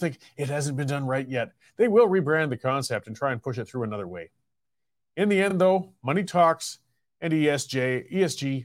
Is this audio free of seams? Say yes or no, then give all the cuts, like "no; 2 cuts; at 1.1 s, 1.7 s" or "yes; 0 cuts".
yes; 0 cuts